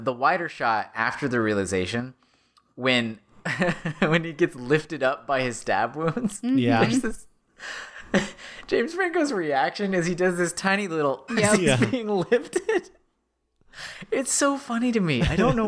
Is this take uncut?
no; 1 cut; at 11.3 s

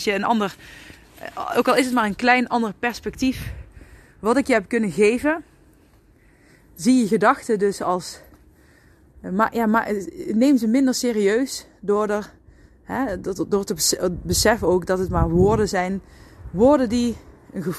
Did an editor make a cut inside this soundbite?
no; 0 cuts

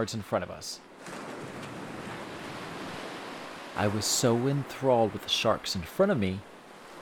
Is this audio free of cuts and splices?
no; 1 cut; at 3.7 s

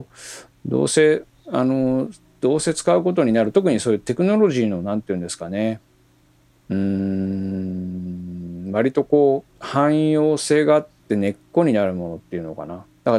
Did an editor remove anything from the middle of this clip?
yes; 1 cut; at 9.5 s

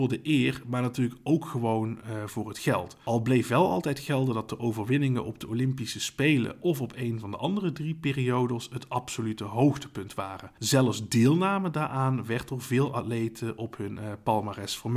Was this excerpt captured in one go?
yes; 0 cuts

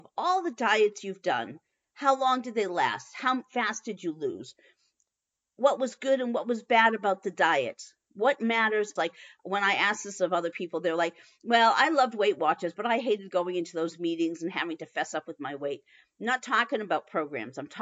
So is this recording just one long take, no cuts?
no; 1 cut; at 9.0 s

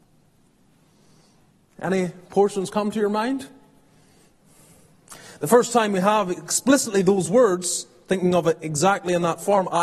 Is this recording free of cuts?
yes; 0 cuts

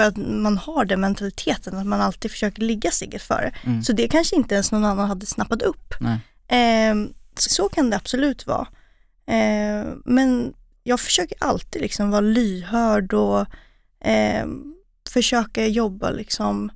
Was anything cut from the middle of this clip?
yes; 1 cut; at 7.5 s

